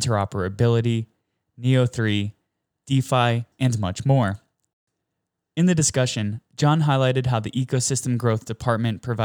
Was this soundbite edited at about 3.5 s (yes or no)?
yes